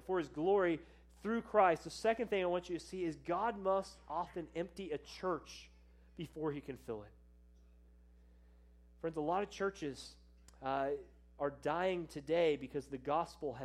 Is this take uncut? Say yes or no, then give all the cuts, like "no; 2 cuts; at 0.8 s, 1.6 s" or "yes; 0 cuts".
yes; 0 cuts